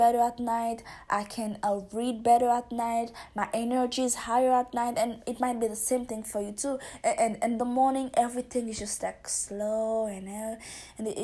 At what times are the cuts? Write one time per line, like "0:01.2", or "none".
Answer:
0:01.1